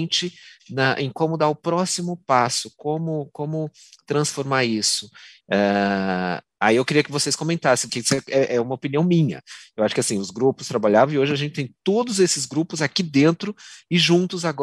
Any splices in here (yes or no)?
yes